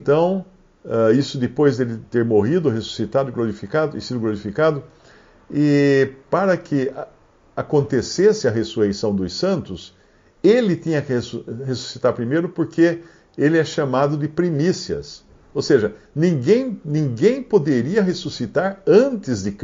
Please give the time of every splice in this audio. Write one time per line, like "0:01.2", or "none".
none